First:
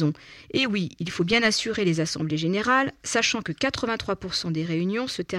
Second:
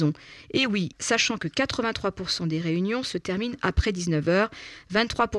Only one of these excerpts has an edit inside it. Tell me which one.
second; 1 cut; at 0.9 s

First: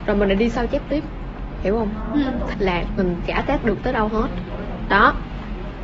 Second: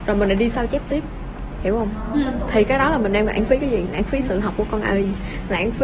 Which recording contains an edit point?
first; 1 cut; at 2.5 s

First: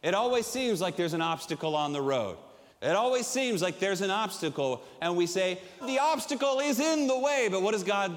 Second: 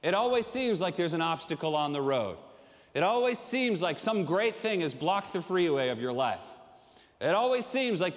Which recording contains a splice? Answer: first; 2 cuts; at 2.7 s, 5.8 s

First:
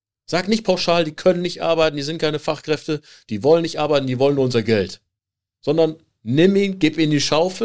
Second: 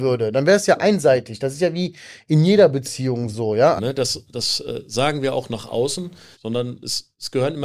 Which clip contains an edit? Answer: second; 2 cuts; at 3.8 s, 6.3 s

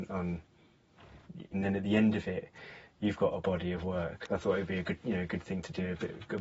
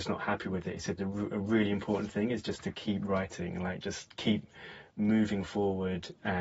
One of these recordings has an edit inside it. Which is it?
first; 2 cuts; at 1.5 s, 4.3 s

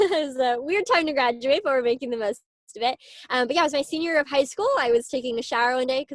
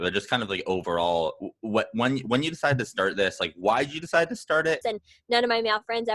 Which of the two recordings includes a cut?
second; 1 cut; at 4.8 s

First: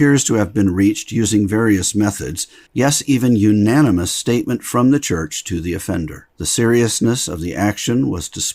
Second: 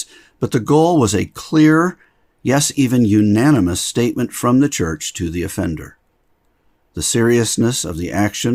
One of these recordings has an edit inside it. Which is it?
first; 2 cuts; at 2.7 s, 6.3 s

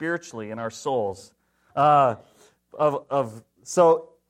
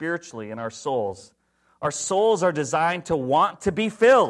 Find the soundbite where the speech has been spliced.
first; 2 cuts; at 1.7 s, 3.0 s

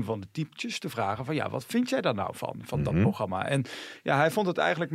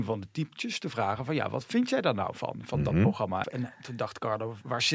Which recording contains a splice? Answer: second; 1 cut; at 3.4 s

